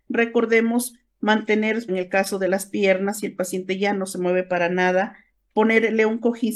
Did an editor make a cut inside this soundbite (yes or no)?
yes